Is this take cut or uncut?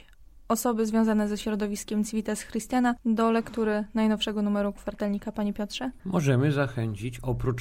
uncut